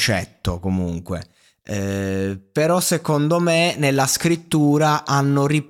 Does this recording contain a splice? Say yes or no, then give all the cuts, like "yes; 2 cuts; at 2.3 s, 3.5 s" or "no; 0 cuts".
no; 0 cuts